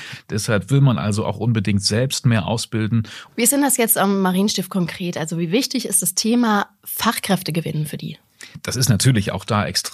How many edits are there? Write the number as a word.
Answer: one